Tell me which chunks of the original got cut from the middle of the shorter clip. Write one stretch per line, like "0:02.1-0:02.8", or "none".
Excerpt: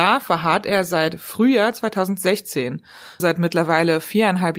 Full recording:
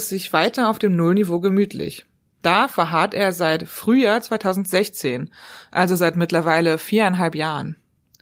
0:05.7-0:06.0